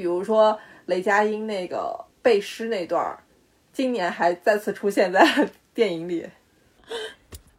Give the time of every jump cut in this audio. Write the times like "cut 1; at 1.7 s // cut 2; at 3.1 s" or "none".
cut 1; at 2.1 s